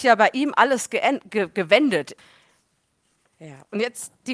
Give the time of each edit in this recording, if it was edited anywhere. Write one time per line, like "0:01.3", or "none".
0:02.2